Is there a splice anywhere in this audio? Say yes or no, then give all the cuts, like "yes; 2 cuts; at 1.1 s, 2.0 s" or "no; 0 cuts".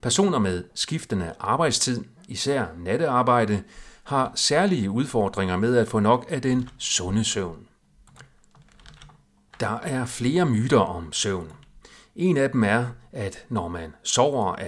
no; 0 cuts